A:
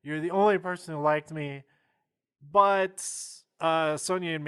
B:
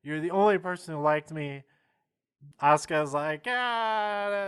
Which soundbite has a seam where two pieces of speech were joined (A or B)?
B